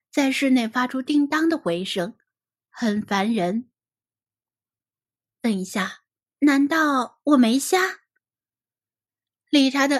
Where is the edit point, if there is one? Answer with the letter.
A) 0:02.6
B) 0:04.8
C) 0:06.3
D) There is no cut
C